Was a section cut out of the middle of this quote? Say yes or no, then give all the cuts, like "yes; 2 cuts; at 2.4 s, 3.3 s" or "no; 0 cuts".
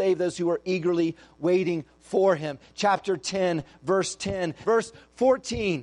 yes; 1 cut; at 4.6 s